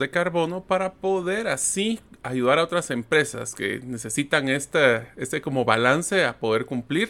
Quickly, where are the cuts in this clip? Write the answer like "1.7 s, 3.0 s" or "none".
none